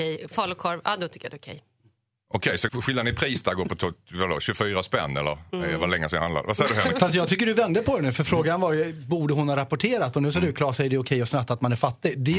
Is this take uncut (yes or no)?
no